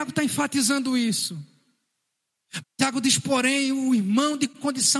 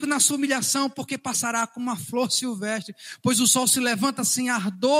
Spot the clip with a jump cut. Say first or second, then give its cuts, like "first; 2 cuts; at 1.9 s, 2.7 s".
first; 1 cut; at 2.6 s